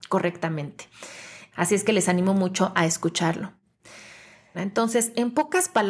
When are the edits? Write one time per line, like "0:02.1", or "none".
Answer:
0:01.5
0:04.5